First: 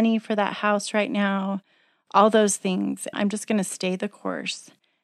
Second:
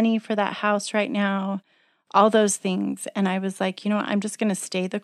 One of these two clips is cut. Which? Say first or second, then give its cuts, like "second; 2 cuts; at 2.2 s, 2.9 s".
first; 1 cut; at 3.1 s